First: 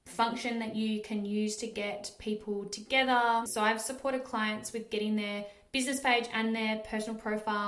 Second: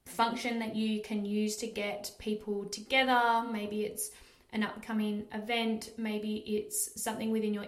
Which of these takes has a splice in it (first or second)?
first